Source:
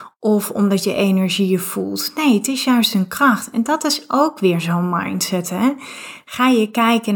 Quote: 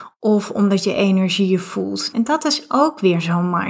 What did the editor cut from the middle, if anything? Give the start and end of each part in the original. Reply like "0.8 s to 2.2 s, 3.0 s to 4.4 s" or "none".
2.1 s to 3.5 s